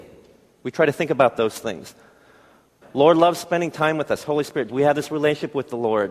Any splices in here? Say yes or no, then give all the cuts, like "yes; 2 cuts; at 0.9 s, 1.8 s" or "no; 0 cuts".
yes; 2 cuts; at 2.8 s, 4.7 s